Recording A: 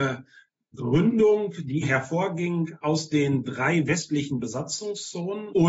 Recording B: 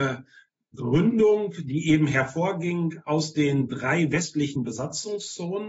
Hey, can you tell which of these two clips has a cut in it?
A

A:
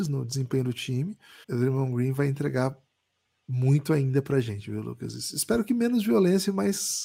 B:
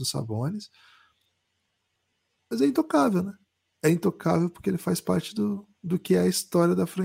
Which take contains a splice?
A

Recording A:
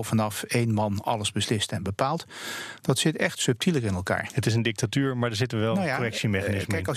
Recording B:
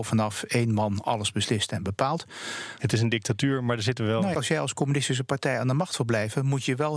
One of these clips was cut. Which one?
B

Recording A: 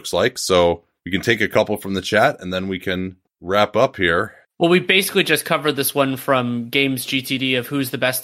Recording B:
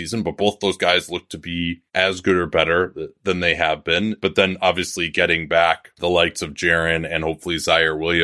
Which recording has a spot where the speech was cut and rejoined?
B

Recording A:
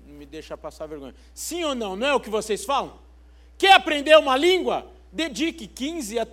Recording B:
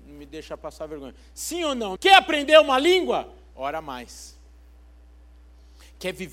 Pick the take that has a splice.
B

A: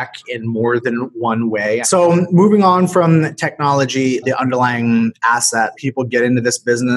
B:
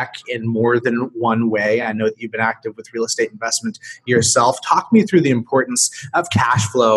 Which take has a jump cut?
A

